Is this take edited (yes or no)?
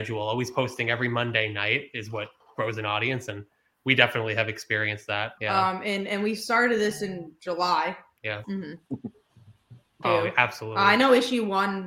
yes